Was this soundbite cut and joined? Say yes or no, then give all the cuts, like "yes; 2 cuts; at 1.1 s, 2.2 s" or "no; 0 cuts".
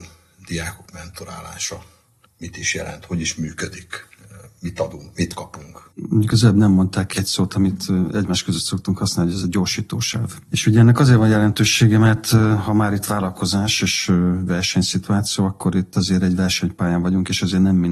no; 0 cuts